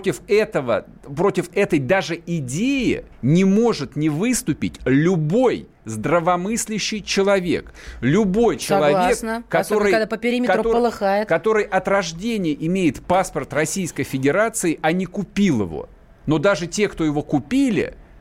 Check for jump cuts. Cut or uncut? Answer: cut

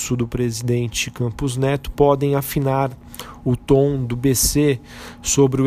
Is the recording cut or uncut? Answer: uncut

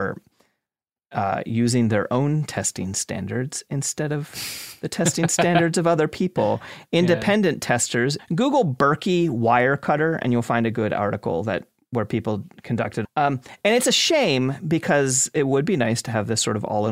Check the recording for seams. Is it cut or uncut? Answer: cut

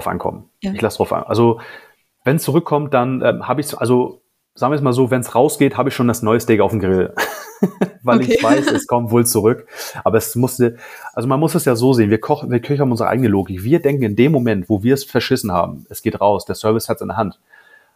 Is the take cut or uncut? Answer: uncut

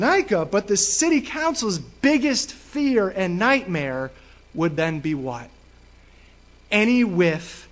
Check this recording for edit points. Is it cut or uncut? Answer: uncut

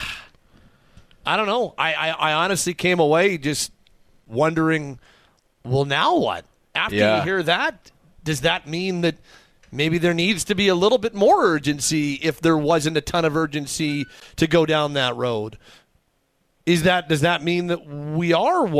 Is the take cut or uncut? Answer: uncut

